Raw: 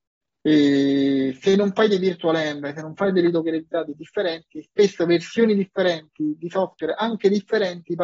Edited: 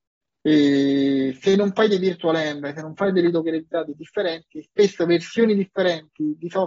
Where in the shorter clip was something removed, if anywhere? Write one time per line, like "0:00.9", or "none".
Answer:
none